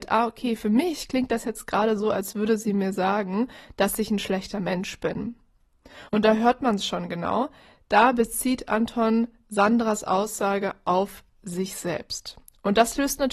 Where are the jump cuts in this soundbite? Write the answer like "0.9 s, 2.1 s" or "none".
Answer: 6.1 s